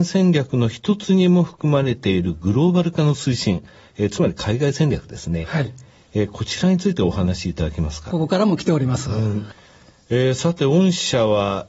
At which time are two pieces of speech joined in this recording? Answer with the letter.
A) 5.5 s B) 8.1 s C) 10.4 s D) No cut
B